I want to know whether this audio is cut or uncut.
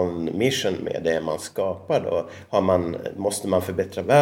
uncut